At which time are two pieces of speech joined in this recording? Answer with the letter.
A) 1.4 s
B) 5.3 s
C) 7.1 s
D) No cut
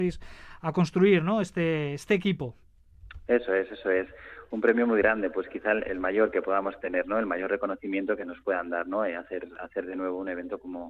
D